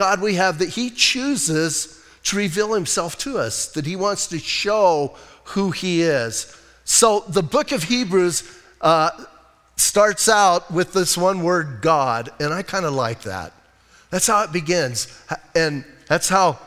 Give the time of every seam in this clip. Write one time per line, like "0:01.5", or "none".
none